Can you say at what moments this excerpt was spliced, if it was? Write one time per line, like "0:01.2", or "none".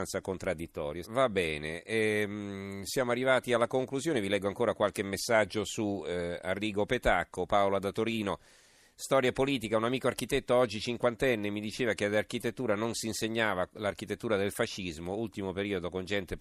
0:01.0